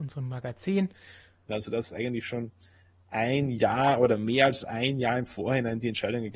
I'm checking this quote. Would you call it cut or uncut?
cut